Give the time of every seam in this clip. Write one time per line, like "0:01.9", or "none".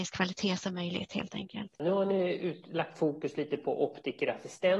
0:01.8